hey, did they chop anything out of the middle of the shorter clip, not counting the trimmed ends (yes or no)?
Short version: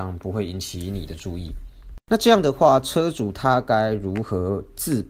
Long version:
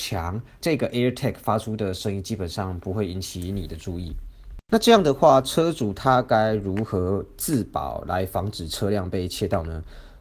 no